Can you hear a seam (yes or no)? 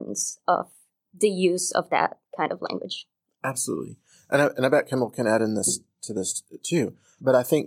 yes